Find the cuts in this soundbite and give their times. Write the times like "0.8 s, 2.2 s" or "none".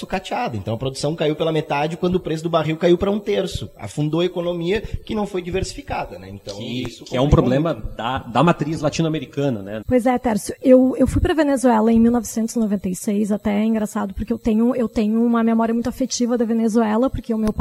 9.8 s